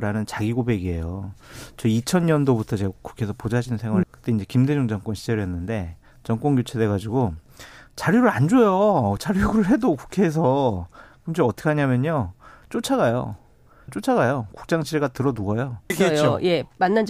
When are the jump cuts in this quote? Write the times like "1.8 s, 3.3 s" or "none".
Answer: 4.0 s, 13.9 s, 15.9 s